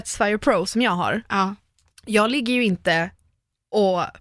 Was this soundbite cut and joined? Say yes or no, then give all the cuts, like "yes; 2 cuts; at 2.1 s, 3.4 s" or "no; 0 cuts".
no; 0 cuts